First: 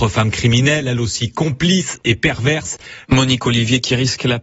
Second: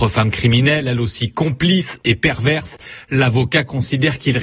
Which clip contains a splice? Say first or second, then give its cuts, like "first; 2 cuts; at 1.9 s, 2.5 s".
first; 1 cut; at 3.1 s